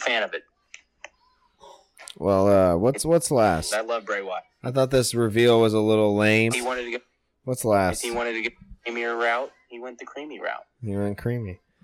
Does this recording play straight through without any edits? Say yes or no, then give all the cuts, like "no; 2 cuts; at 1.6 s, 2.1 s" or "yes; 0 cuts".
no; 2 cuts; at 3.7 s, 6.5 s